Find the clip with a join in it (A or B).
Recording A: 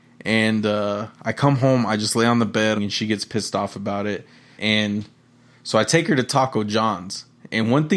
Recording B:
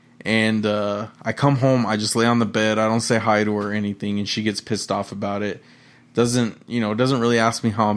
A